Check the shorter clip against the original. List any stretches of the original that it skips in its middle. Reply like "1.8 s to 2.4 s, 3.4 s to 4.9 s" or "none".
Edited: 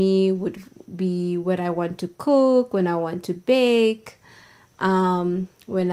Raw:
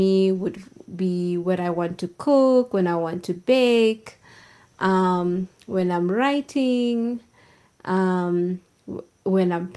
none